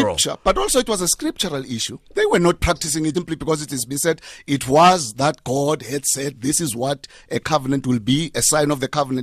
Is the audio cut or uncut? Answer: cut